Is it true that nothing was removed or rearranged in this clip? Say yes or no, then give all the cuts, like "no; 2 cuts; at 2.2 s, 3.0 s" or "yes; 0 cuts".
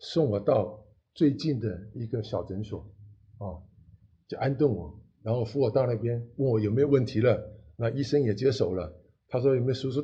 yes; 0 cuts